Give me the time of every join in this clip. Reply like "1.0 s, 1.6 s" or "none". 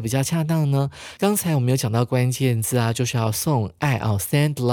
1.2 s